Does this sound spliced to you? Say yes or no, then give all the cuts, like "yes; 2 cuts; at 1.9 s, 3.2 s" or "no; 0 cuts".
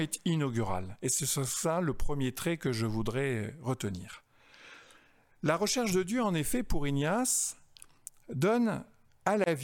no; 0 cuts